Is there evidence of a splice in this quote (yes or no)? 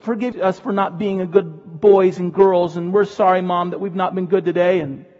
no